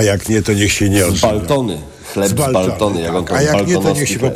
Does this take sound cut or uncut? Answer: uncut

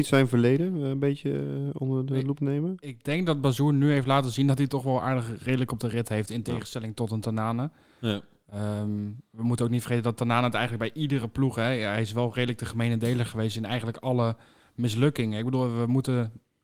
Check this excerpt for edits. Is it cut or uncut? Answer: uncut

